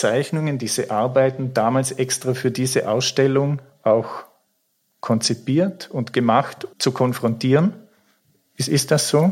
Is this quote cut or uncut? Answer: cut